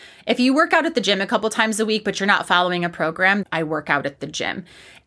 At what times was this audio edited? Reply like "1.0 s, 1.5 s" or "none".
3.4 s